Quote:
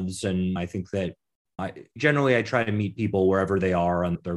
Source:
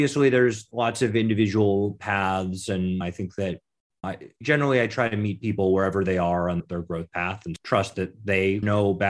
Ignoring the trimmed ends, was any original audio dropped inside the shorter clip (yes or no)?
no